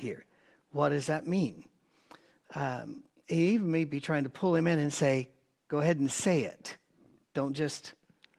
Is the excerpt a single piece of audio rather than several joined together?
yes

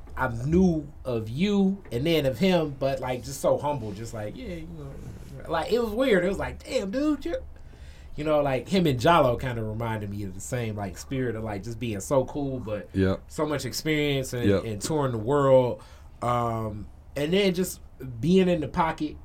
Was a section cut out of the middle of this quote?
no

